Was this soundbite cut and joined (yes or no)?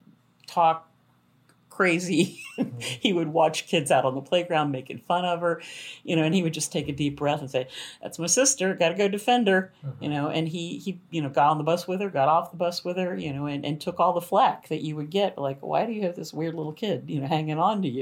no